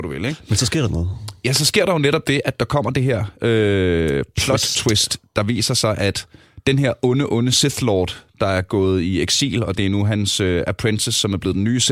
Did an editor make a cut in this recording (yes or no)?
no